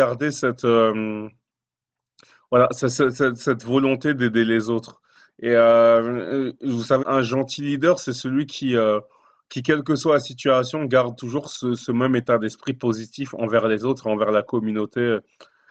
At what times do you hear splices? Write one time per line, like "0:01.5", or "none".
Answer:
0:07.0